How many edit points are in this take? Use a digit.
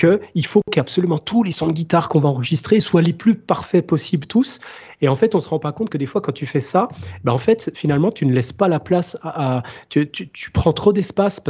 0